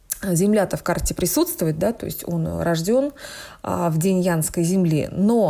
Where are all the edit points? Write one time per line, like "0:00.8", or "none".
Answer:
none